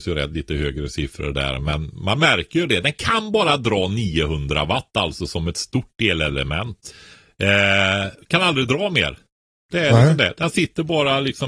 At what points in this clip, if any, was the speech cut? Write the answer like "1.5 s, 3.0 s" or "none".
none